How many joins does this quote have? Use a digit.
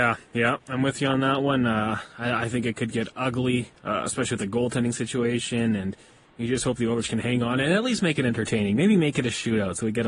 0